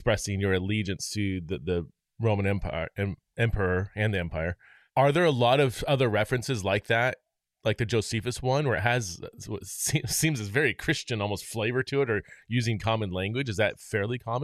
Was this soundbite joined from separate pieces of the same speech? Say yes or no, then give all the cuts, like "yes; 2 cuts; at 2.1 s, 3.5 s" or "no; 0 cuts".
no; 0 cuts